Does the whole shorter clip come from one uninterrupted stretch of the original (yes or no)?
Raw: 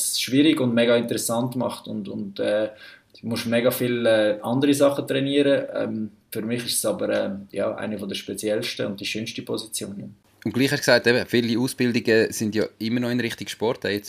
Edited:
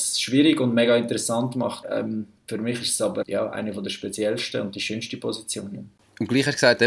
no